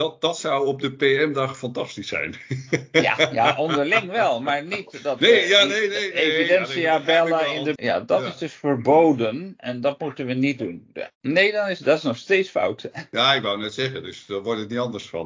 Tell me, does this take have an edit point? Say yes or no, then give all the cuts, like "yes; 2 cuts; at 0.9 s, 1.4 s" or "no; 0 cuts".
yes; 2 cuts; at 7.8 s, 11.1 s